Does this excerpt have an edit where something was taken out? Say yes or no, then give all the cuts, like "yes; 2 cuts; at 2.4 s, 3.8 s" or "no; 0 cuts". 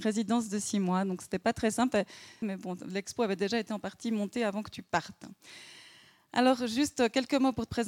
yes; 1 cut; at 2.4 s